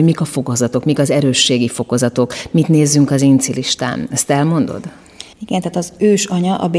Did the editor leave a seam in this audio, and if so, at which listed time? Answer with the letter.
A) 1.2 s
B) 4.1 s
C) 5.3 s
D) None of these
C